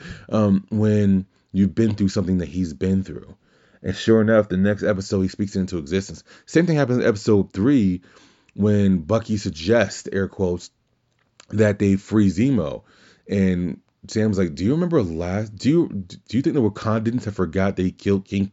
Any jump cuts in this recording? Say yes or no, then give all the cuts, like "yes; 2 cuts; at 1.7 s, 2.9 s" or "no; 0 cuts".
no; 0 cuts